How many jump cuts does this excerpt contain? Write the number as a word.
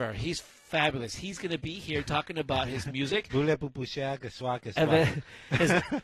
zero